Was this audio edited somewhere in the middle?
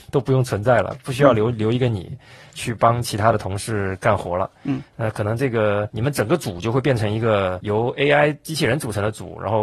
no; 0 cuts

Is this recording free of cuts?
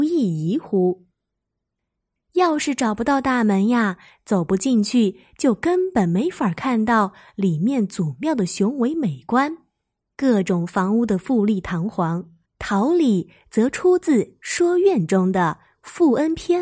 no; 2 cuts; at 2.2 s, 12.5 s

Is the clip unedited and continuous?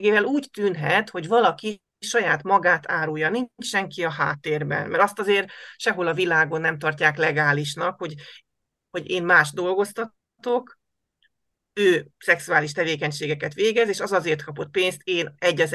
yes; 0 cuts

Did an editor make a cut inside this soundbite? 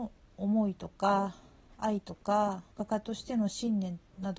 yes; 1 cut; at 2.7 s

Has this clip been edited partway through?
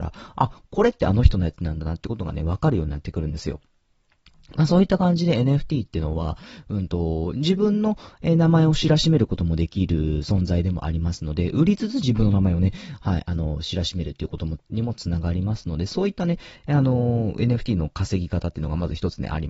no; 0 cuts

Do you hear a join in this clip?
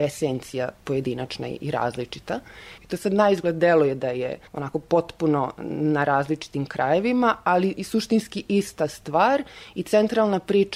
yes; 2 cuts; at 2.8 s, 4.5 s

